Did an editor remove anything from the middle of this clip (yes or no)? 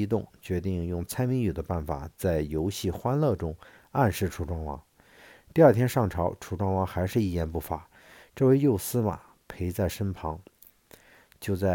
no